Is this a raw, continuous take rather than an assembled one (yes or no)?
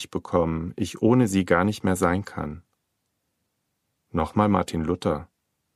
yes